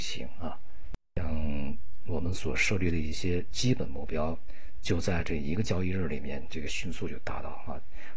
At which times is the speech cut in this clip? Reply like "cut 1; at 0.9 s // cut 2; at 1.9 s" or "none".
none

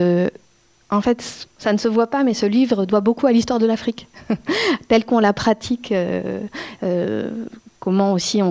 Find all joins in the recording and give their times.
cut 1; at 1.5 s // cut 2; at 6.8 s

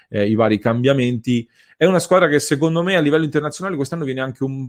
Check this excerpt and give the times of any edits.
none

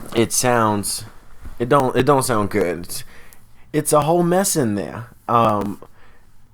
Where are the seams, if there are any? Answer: none

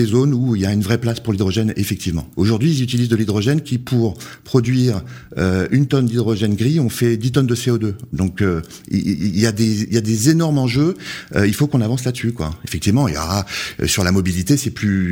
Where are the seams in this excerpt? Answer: cut 1; at 2.3 s

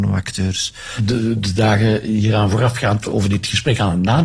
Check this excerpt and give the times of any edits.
cut 1; at 1.0 s

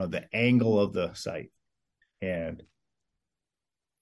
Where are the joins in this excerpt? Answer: cut 1; at 2.0 s

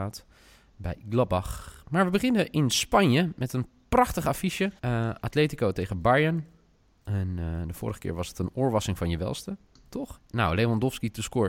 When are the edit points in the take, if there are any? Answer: cut 1; at 4.8 s // cut 2; at 10.2 s

